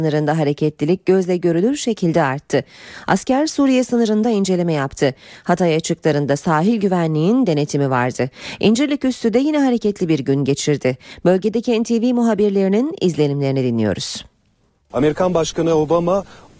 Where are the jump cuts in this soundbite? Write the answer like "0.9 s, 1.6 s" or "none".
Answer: none